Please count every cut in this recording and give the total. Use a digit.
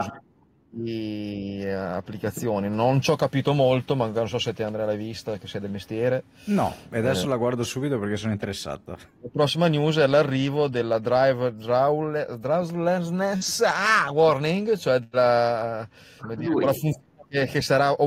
2